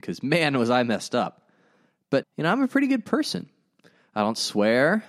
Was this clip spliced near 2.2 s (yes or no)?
yes